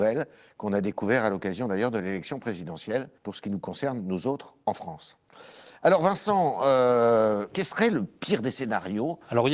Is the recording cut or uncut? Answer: cut